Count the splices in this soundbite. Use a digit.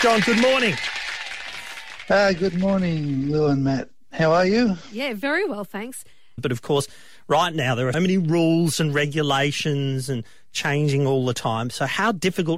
2